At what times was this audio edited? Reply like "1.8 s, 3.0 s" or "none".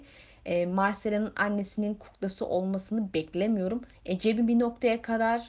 3.9 s